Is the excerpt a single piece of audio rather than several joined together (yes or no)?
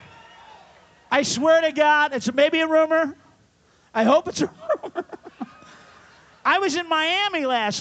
yes